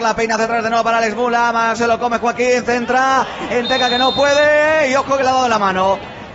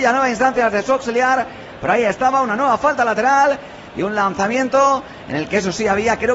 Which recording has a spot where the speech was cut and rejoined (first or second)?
first